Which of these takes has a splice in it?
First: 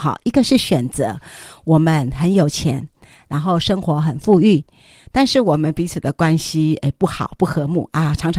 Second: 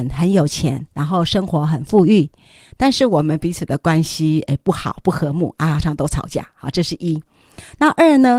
second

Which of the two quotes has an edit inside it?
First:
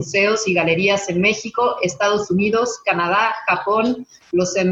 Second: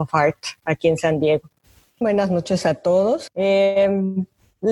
second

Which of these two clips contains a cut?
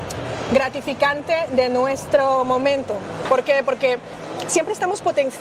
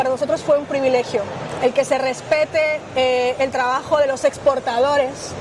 second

